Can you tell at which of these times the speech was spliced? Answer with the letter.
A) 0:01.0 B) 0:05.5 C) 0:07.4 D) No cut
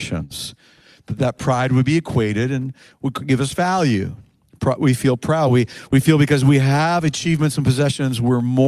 D